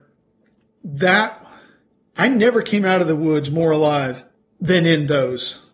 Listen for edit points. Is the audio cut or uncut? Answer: uncut